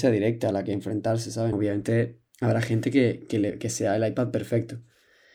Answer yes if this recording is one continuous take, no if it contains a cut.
no